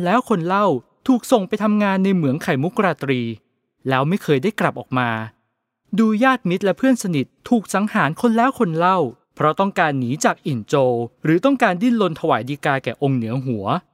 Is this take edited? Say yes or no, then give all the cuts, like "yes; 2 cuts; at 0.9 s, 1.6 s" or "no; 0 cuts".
yes; 2 cuts; at 9.2 s, 11.1 s